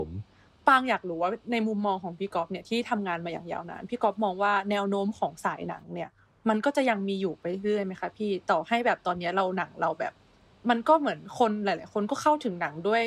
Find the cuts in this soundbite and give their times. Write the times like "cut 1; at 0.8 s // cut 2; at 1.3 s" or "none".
none

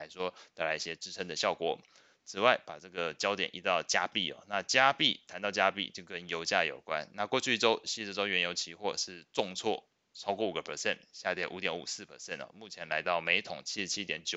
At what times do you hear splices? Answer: none

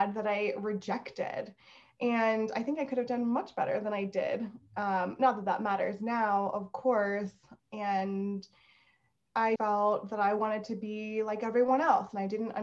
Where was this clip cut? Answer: cut 1; at 7.6 s // cut 2; at 9.6 s

